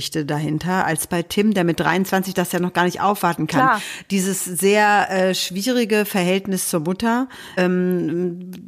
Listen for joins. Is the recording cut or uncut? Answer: cut